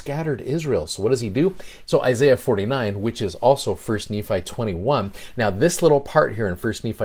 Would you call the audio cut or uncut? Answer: cut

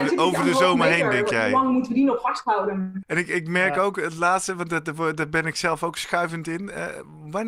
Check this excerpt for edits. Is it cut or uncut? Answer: cut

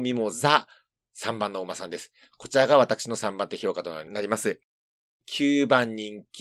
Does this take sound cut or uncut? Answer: uncut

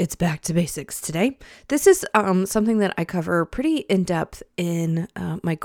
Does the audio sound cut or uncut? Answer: uncut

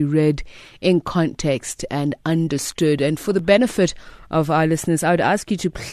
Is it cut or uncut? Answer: uncut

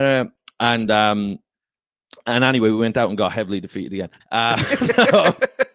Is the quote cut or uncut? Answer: cut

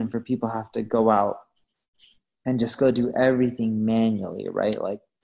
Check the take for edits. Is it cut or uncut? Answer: uncut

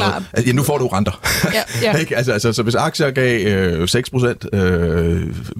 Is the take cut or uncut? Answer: uncut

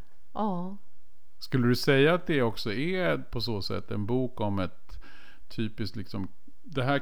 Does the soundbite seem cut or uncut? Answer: uncut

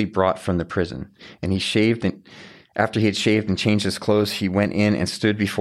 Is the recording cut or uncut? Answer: uncut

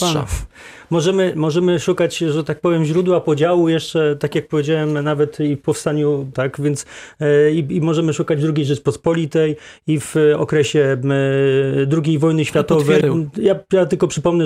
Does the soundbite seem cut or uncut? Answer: cut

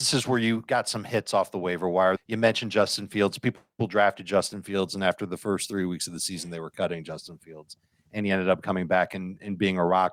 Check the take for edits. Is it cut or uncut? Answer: cut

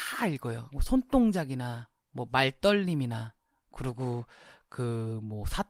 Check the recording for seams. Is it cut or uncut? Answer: uncut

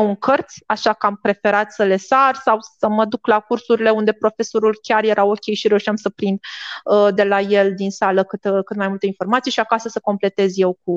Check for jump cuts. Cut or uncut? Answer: uncut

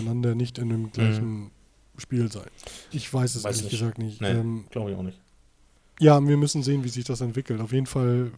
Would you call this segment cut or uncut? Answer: cut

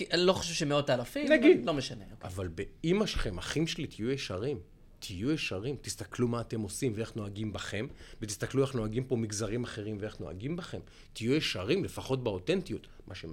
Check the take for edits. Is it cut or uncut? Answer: uncut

